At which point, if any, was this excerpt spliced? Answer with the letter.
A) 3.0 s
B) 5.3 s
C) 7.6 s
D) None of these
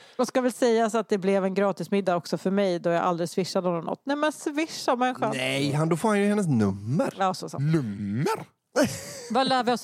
D